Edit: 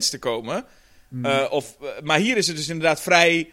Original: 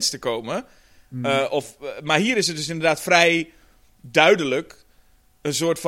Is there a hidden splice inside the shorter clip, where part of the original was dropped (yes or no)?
no